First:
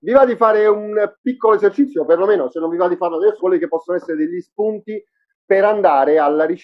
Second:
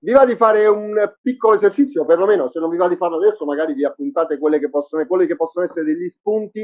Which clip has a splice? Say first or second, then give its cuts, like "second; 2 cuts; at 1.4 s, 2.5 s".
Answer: first; 1 cut; at 3.4 s